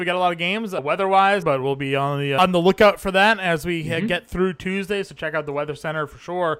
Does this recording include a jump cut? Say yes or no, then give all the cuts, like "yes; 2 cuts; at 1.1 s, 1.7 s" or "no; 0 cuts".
yes; 1 cut; at 1.4 s